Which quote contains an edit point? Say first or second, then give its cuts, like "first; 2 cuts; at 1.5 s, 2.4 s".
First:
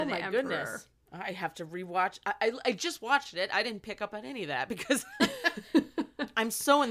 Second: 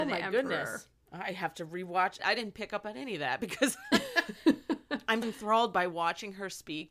second; 2 cuts; at 2.2 s, 5.2 s